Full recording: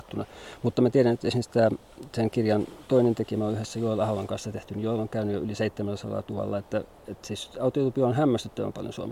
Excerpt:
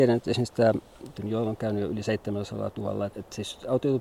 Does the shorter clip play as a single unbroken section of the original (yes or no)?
no